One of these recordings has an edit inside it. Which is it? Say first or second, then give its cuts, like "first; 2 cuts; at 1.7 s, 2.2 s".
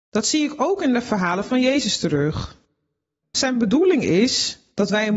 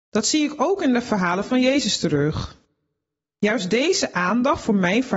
first; 1 cut; at 3.2 s